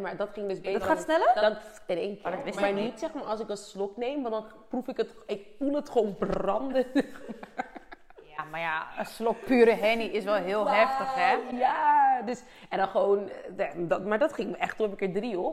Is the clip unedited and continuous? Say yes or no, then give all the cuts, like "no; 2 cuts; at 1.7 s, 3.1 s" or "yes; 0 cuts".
yes; 0 cuts